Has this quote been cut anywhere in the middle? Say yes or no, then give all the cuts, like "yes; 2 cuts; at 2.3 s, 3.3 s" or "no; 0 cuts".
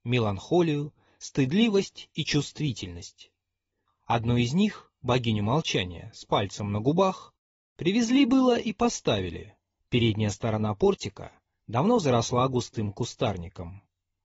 yes; 1 cut; at 9.8 s